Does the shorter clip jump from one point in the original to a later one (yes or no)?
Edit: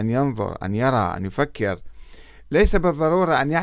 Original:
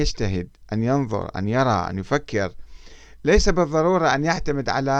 no